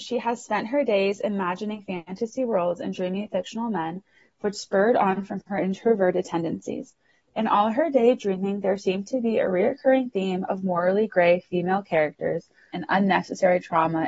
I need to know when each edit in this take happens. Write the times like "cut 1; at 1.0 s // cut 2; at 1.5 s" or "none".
cut 1; at 12.7 s